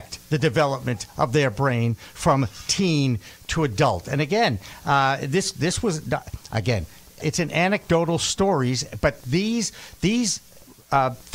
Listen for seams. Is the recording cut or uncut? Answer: cut